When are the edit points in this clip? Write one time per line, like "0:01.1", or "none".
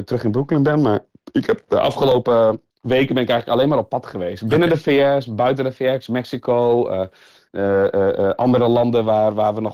0:02.7